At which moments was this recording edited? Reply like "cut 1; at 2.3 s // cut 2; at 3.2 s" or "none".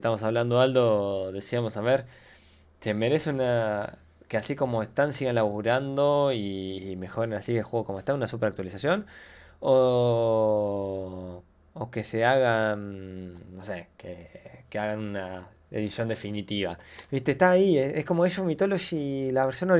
none